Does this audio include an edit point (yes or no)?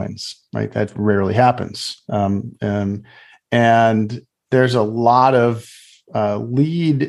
no